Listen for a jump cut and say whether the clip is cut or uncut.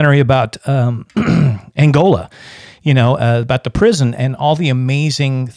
cut